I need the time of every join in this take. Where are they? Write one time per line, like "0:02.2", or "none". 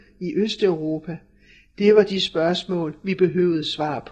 none